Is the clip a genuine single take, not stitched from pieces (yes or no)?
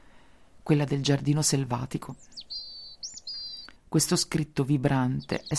no